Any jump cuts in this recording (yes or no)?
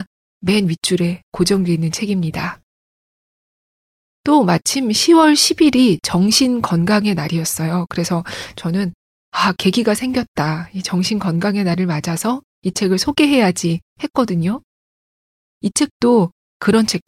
yes